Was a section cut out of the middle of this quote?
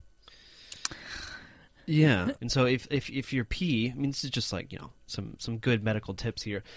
yes; 1 cut; at 2.4 s

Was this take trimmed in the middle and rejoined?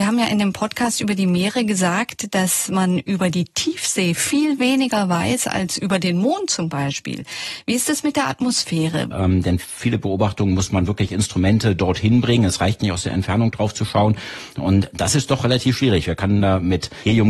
yes; 1 cut; at 9.1 s

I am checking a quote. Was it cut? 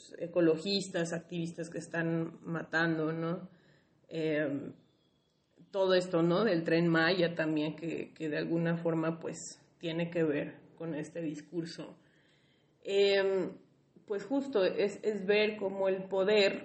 no; 0 cuts

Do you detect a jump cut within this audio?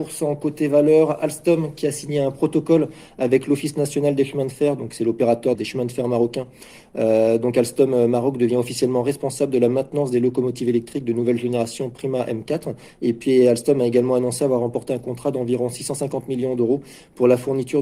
yes; 1 cut; at 5.5 s

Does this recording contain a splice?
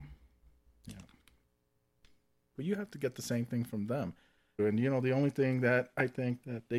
yes; 2 cuts; at 2.5 s, 4.6 s

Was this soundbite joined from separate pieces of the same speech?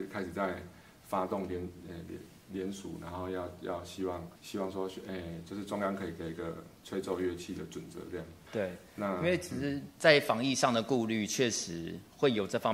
yes; 2 cuts; at 4.4 s, 8.5 s

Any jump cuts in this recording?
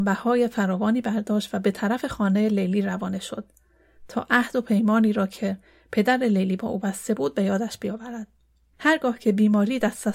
yes; 1 cut; at 8.7 s

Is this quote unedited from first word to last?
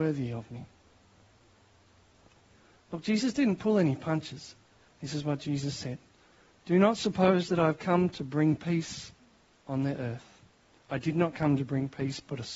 no; 1 cut; at 4.9 s

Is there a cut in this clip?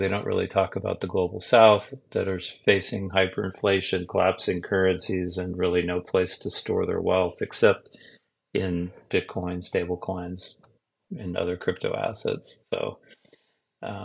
no; 0 cuts

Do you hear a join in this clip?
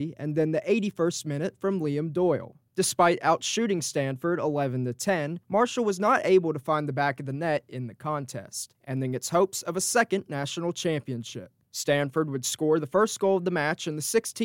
yes; 1 cut; at 11.6 s

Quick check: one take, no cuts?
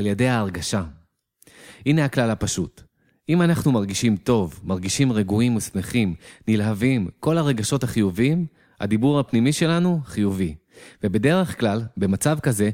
yes; 0 cuts

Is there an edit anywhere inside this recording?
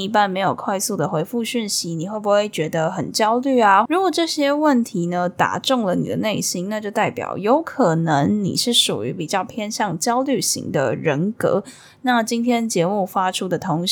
yes; 1 cut; at 3.9 s

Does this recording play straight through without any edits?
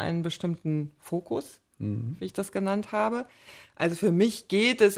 yes; 0 cuts

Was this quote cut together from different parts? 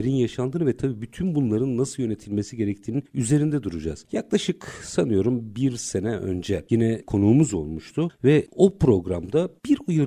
no; 0 cuts

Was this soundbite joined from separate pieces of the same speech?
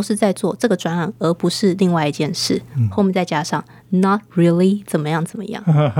no; 0 cuts

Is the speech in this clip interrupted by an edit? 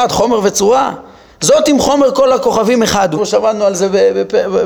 yes; 1 cut; at 3.1 s

